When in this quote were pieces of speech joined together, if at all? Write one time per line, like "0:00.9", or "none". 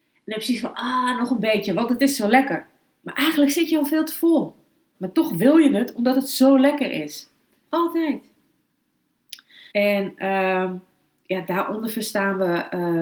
0:04.9
0:07.7
0:09.7

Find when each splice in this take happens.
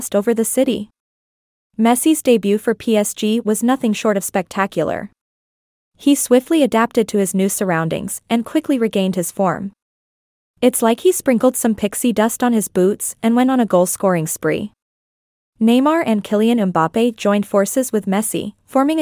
none

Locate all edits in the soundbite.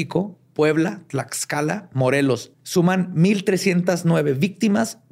0:02.5

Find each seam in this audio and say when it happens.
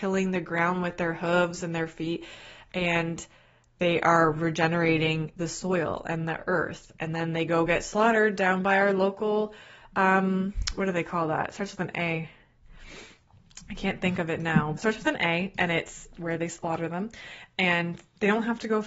0:14.8

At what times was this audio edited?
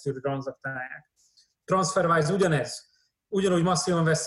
0:01.5

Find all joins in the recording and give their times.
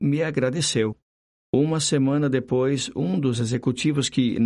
none

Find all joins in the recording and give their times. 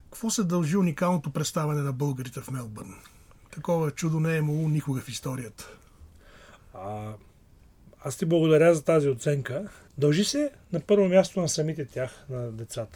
0:09.9

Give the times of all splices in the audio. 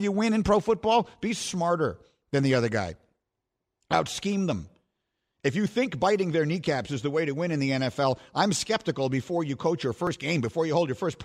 none

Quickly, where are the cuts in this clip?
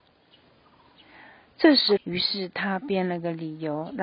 0:02.0

